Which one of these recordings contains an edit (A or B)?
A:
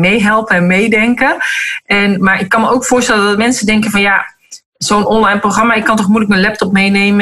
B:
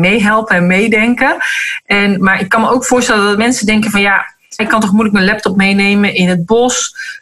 B